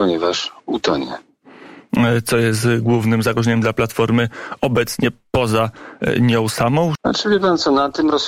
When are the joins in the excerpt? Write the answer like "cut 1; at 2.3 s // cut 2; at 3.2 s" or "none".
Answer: cut 1; at 7.0 s